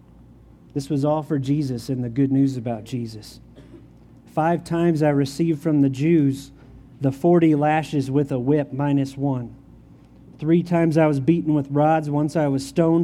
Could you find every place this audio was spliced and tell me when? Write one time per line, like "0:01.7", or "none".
none

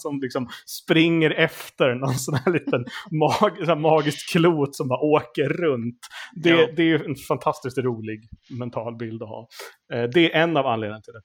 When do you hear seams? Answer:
none

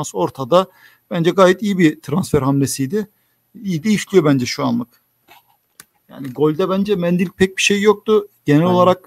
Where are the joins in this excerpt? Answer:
0:06.0

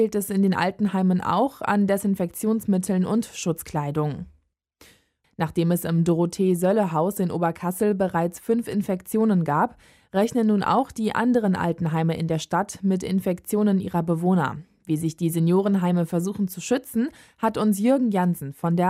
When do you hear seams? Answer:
0:05.2

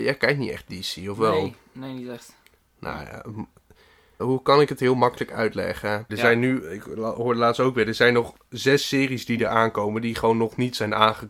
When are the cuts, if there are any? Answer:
0:04.2
0:06.1

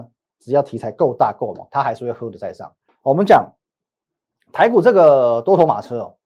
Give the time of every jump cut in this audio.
0:02.9

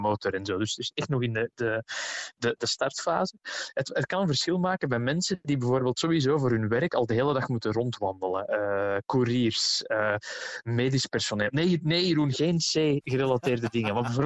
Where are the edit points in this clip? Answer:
none

